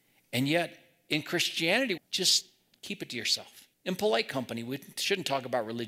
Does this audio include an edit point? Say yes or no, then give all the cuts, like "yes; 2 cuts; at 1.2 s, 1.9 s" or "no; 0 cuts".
yes; 2 cuts; at 2.0 s, 3.7 s